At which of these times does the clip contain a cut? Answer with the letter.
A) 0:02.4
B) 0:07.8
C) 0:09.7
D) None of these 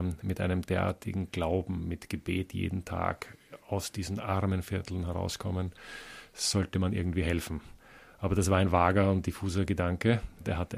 D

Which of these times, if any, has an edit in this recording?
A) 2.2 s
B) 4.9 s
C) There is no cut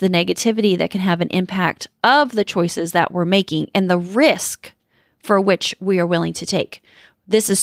C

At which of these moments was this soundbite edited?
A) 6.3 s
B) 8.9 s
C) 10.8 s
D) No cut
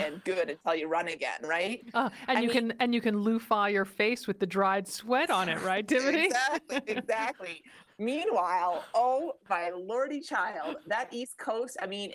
D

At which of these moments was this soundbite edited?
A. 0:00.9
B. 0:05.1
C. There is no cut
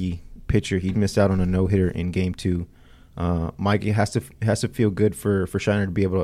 A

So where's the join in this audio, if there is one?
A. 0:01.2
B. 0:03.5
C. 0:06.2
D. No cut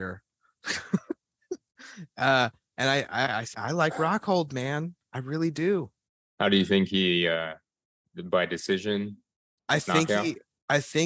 B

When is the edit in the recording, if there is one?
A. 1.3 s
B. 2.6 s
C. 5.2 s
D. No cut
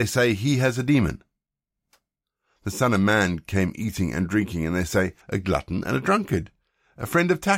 C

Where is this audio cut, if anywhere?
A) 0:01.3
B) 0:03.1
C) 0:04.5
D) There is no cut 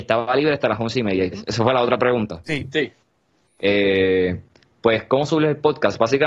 A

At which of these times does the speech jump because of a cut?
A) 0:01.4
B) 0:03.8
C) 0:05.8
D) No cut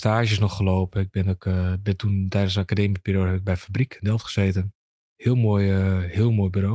D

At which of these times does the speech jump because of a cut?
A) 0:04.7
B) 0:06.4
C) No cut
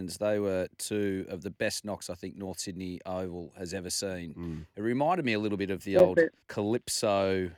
B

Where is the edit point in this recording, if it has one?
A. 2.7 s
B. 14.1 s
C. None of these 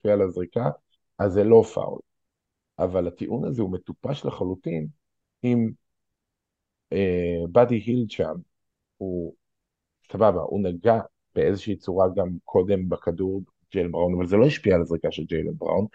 C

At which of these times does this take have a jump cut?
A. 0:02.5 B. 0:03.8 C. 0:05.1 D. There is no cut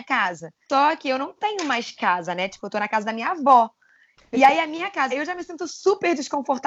C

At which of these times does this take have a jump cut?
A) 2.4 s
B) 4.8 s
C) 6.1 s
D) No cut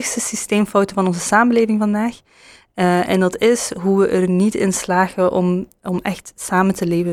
D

